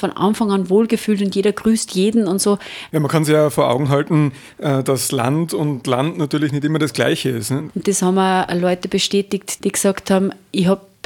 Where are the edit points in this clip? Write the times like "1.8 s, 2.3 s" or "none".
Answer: 2.9 s, 7.7 s, 9.6 s